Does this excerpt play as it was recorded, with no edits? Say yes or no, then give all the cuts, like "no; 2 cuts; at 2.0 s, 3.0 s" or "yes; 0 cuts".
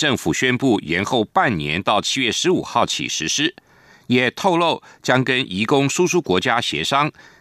yes; 0 cuts